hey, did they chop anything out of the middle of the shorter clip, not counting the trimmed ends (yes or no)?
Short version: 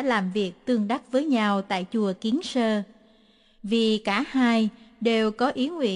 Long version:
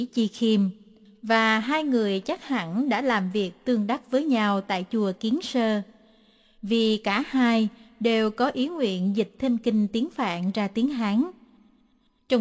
no